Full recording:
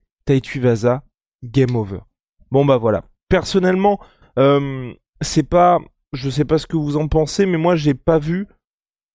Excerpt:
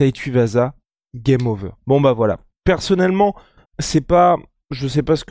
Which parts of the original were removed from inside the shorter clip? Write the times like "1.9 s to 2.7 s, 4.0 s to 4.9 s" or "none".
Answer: 2.1 s to 2.4 s, 4.3 s to 5.1 s